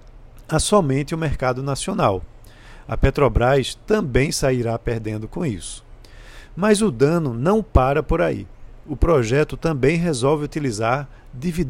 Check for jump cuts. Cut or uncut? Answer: uncut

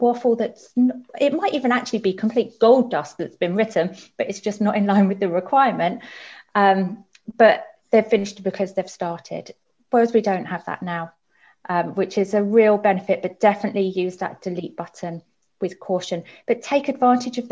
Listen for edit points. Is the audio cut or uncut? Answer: uncut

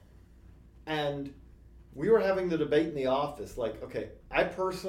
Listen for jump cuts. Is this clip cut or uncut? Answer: uncut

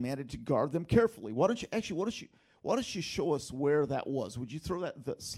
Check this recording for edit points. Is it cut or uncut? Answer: uncut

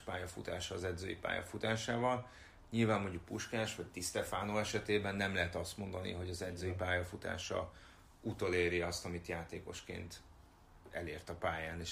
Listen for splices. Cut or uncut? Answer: uncut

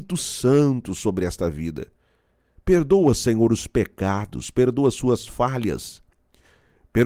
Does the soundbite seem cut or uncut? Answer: uncut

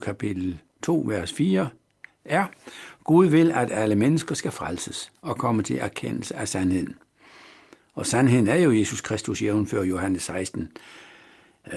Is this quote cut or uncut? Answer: uncut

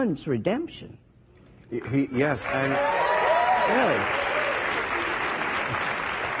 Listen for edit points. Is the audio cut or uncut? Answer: uncut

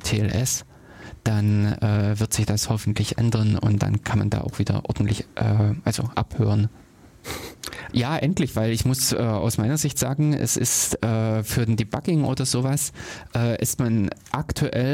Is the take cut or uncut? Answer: cut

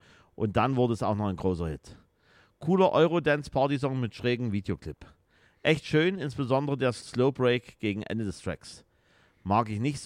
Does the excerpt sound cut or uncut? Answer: uncut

